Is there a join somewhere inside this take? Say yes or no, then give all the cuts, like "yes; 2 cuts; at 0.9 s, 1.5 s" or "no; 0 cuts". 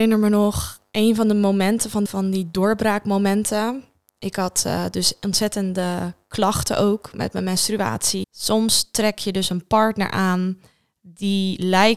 yes; 2 cuts; at 2.1 s, 8.2 s